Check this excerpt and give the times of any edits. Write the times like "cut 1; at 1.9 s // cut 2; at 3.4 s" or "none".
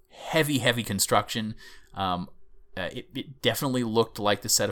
none